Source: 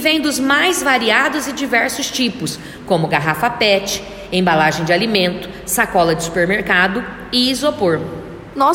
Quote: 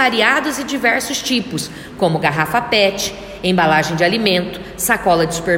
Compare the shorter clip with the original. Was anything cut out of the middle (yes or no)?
no